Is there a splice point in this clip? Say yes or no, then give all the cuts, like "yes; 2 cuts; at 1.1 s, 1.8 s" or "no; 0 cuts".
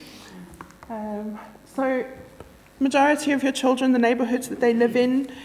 no; 0 cuts